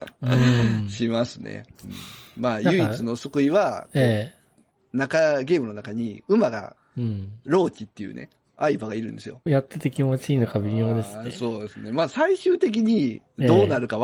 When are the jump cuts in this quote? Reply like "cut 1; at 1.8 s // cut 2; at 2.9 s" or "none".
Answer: cut 1; at 6.8 s // cut 2; at 9.5 s